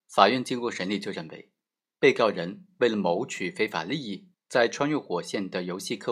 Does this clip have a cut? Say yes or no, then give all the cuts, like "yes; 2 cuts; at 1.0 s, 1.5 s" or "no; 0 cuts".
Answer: yes; 1 cut; at 4.3 s